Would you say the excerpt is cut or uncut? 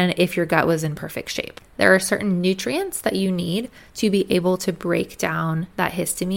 cut